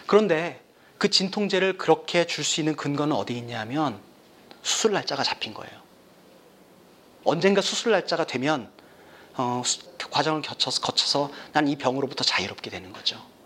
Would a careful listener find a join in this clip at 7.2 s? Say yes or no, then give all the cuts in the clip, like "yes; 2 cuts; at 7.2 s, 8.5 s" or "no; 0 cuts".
no; 1 cut; at 9.9 s